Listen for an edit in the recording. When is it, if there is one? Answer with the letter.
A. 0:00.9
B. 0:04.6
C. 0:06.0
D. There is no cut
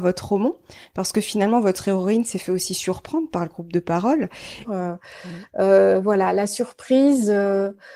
B